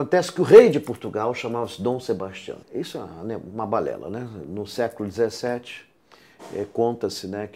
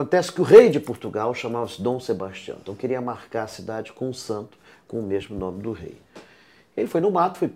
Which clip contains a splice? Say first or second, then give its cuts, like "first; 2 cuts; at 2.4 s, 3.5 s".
first; 1 cut; at 2.6 s